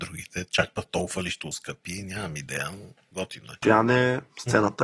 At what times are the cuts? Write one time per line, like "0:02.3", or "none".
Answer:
0:03.6